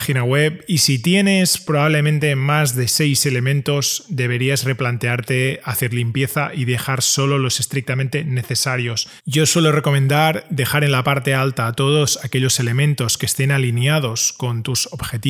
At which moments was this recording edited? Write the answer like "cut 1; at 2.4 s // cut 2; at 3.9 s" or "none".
cut 1; at 9.2 s

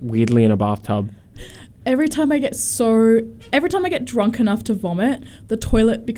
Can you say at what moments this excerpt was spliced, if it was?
cut 1; at 1.3 s

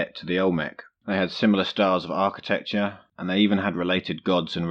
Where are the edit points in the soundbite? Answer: cut 1; at 3.1 s

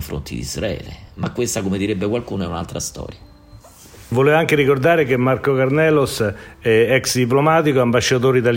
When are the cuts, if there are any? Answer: none

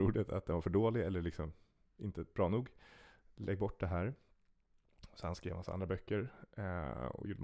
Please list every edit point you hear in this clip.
none

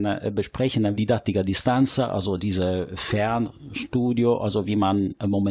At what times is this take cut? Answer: cut 1; at 0.9 s

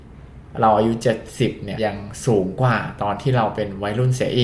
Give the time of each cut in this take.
cut 1; at 1.8 s

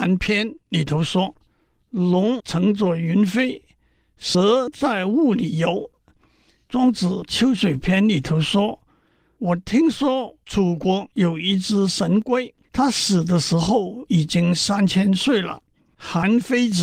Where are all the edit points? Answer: cut 1; at 5.9 s // cut 2; at 12.6 s // cut 3; at 15.9 s

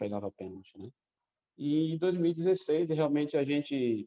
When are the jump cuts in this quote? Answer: cut 1; at 1.4 s

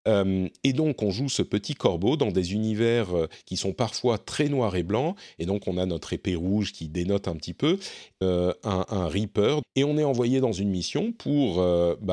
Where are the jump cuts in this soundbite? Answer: cut 1; at 8.2 s // cut 2; at 9.6 s

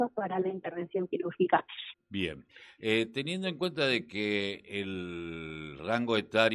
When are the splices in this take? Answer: cut 1; at 1.9 s

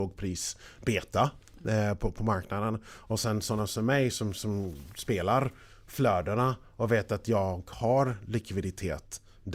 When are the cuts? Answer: none

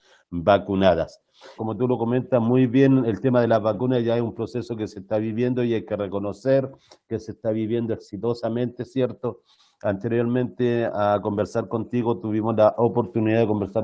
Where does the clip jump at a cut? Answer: cut 1; at 1.6 s

